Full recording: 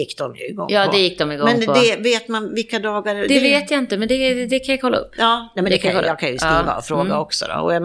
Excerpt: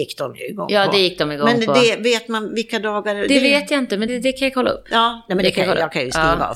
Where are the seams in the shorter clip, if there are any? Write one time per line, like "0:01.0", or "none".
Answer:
0:04.1